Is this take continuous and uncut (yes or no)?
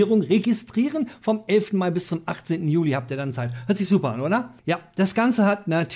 no